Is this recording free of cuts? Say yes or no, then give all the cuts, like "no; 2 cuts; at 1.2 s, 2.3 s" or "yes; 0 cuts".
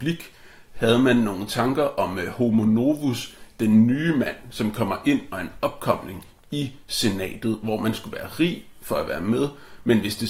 yes; 0 cuts